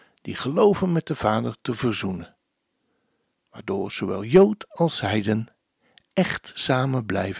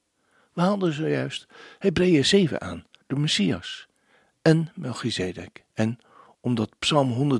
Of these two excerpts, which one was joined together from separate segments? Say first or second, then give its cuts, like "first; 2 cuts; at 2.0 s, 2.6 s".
second; 2 cuts; at 3.0 s, 5.7 s